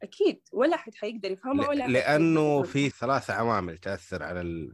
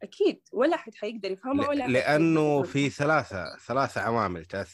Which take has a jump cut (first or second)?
first